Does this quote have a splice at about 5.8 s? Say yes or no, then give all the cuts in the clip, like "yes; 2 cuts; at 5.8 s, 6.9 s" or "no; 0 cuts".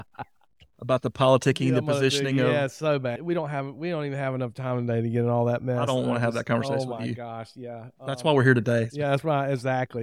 no; 1 cut; at 3.2 s